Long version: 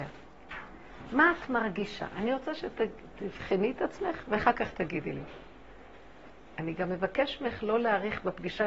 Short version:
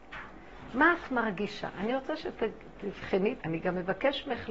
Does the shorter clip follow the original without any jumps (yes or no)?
no